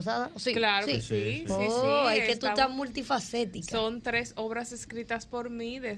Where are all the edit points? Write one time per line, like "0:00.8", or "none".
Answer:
none